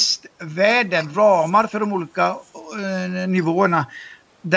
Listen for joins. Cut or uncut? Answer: uncut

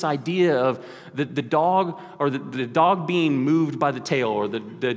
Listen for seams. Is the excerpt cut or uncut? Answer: uncut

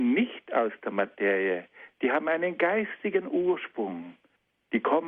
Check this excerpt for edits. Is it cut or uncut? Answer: uncut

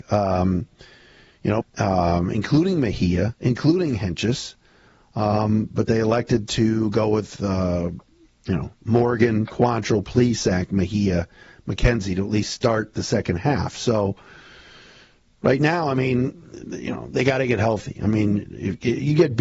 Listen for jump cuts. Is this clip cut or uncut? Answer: cut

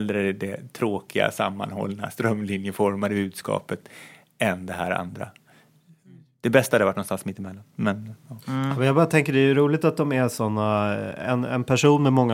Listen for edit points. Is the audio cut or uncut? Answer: uncut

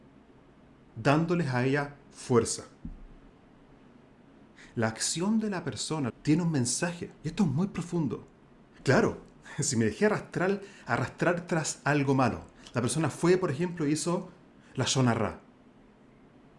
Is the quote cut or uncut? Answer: cut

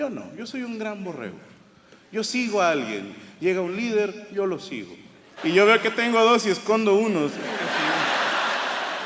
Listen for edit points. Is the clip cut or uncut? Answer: cut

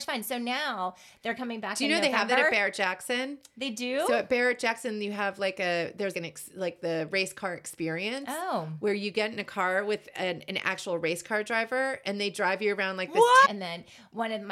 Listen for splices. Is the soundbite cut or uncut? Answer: cut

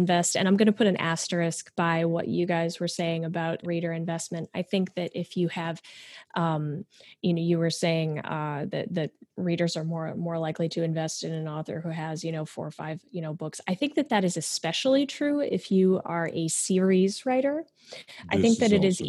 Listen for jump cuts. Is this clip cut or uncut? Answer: cut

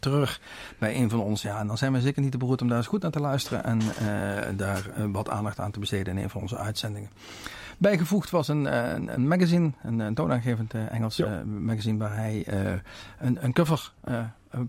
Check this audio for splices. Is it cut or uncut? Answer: uncut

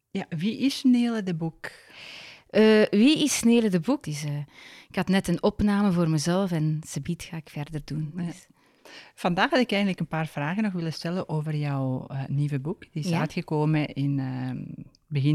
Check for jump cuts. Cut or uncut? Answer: cut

